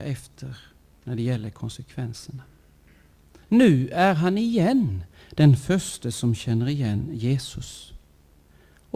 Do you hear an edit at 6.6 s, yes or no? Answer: no